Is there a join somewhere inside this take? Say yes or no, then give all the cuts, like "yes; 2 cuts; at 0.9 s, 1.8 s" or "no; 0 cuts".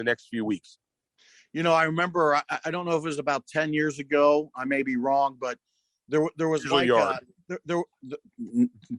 no; 0 cuts